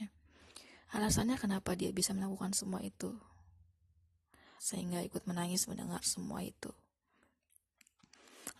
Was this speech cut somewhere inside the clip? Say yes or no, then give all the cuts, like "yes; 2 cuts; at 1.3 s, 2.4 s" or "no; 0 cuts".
yes; 1 cut; at 4.6 s